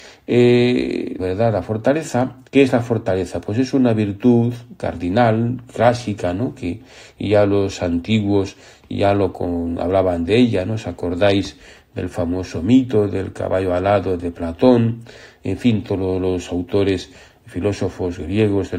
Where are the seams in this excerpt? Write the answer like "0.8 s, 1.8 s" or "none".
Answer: 1.2 s, 2.4 s